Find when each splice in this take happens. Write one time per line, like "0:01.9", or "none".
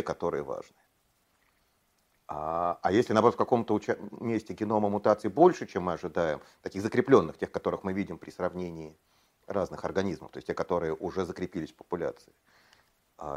none

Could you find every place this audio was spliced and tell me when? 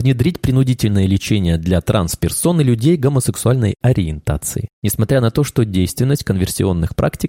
none

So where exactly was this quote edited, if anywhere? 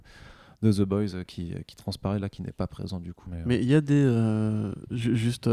0:03.3

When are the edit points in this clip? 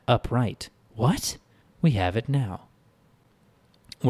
0:01.6

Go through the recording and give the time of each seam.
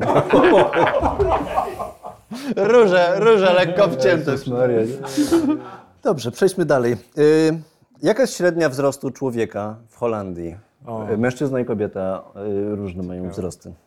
0:02.6

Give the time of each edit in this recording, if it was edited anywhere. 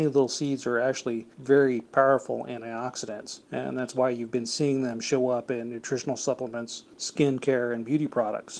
none

